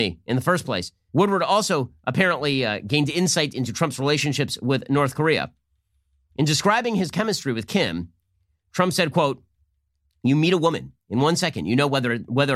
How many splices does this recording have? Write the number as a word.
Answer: one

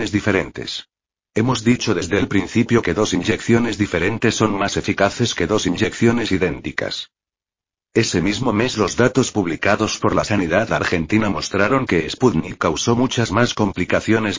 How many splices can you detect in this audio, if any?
zero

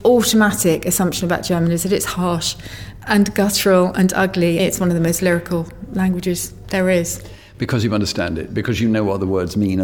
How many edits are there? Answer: one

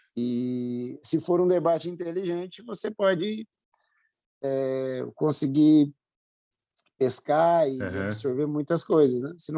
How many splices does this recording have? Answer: zero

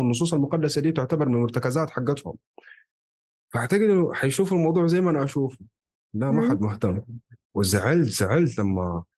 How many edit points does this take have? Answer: zero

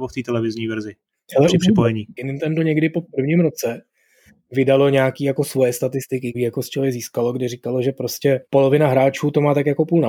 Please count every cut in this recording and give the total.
three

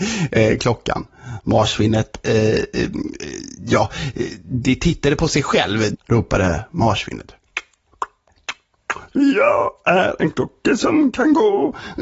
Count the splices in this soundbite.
one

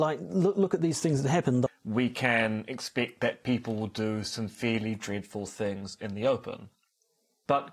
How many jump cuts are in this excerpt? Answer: one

